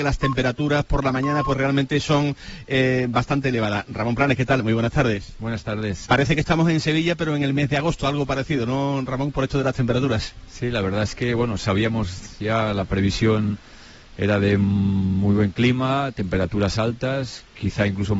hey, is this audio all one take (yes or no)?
no